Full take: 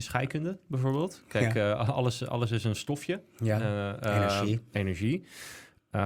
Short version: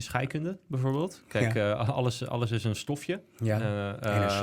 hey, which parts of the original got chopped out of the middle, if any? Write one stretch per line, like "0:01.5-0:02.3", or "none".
none